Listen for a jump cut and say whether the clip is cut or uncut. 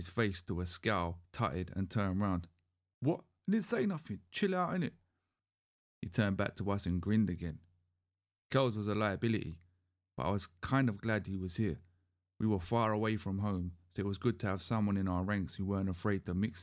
uncut